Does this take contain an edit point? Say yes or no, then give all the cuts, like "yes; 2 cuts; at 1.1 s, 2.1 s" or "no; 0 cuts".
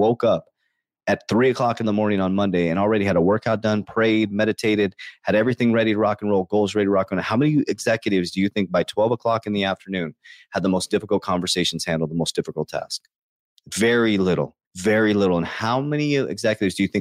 yes; 1 cut; at 14.6 s